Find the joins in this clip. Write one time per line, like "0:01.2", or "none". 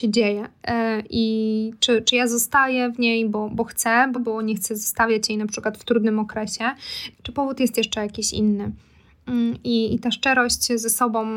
0:04.1
0:07.1

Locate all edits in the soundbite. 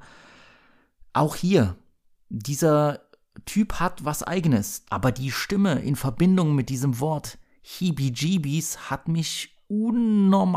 0:04.8

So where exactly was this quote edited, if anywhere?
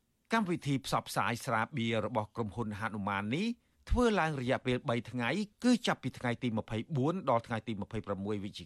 none

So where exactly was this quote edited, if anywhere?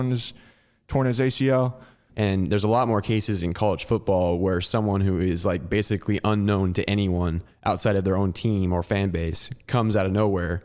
0:02.1

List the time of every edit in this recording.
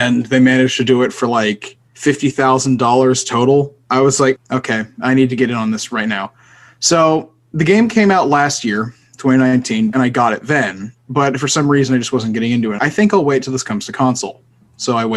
0:04.4
0:09.9
0:12.8

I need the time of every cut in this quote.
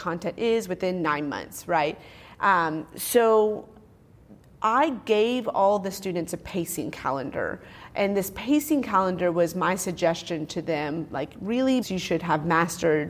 0:11.8

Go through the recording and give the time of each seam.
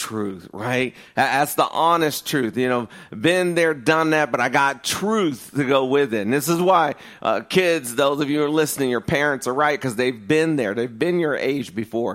none

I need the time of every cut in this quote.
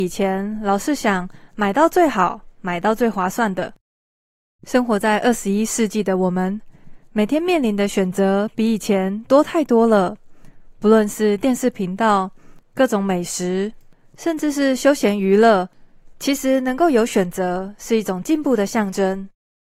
0:12.6
0:16.1

